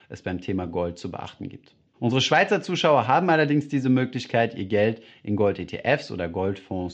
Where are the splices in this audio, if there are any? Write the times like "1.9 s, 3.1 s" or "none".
1.9 s